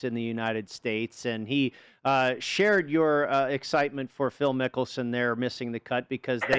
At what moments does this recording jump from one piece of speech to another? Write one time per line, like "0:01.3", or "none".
none